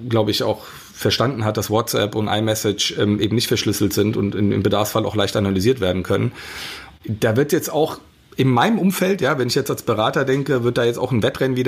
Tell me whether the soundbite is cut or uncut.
uncut